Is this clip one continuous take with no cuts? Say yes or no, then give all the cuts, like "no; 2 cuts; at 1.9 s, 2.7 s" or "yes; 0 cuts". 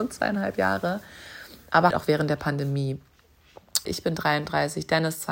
no; 2 cuts; at 1.9 s, 3.9 s